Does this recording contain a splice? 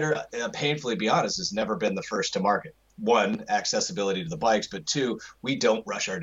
no; 0 cuts

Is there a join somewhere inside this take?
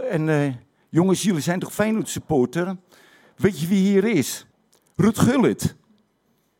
no; 0 cuts

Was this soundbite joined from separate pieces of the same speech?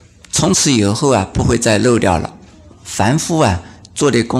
no; 0 cuts

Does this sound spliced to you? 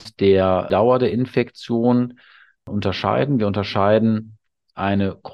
no; 0 cuts

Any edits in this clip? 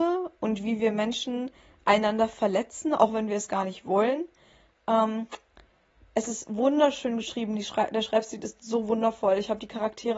no; 0 cuts

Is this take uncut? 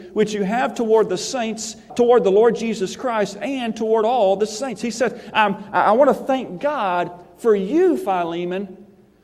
no; 1 cut; at 1.9 s

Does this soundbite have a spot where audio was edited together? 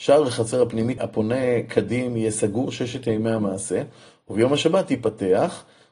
yes; 1 cut; at 1.0 s

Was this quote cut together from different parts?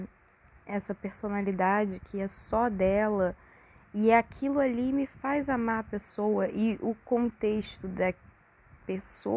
no; 0 cuts

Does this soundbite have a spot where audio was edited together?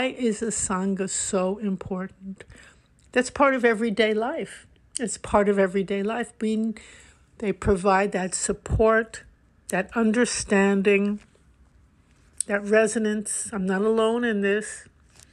no; 0 cuts

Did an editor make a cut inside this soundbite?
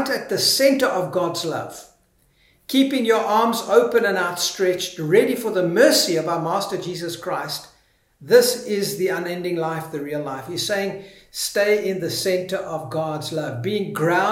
no; 0 cuts

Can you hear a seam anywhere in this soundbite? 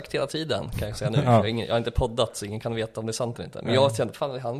no; 0 cuts

